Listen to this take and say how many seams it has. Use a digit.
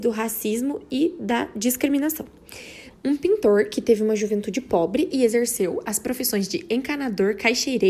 1